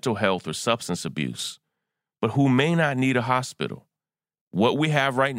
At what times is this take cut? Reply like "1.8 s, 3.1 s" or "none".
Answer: 4.4 s